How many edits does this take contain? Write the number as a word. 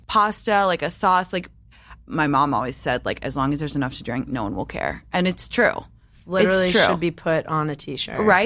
zero